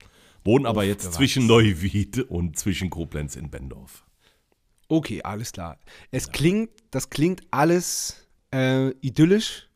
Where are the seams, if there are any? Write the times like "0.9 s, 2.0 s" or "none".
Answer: none